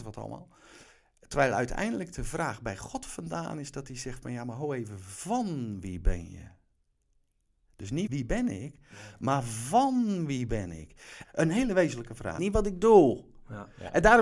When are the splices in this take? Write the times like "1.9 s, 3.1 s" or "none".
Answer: 8.1 s, 11.2 s, 12.4 s